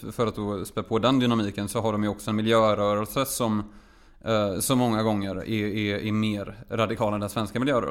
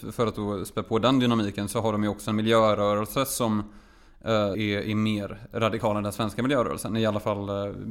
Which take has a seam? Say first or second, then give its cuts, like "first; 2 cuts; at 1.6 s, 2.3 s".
second; 1 cut; at 4.5 s